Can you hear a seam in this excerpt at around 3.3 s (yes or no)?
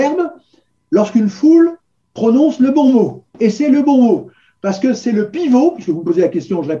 yes